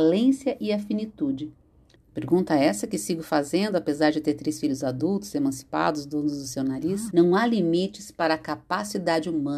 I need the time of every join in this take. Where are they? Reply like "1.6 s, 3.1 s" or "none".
2.0 s, 7.1 s

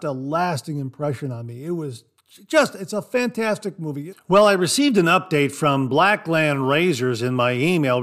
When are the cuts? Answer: 4.1 s

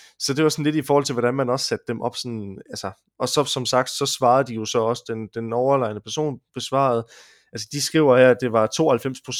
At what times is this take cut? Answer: none

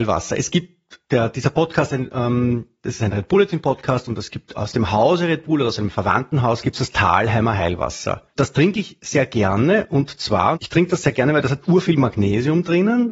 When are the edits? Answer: 1.0 s, 8.3 s, 10.5 s

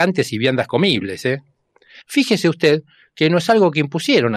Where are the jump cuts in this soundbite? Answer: 2.0 s

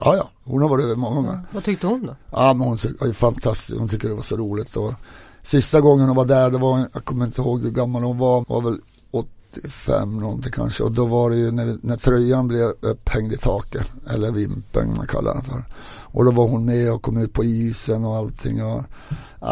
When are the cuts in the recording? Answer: 8.4 s

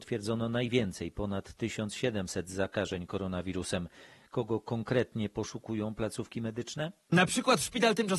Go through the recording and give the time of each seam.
none

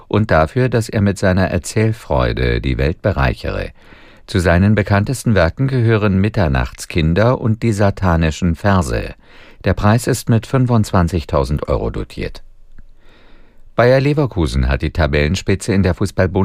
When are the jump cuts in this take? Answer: none

